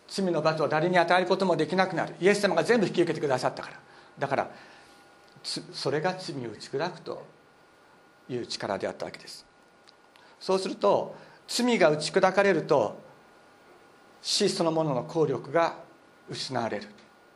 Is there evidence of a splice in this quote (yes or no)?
no